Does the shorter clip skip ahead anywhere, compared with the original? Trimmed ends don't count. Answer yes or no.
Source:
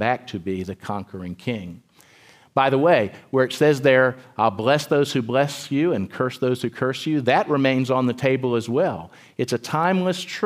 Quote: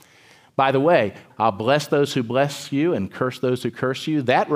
yes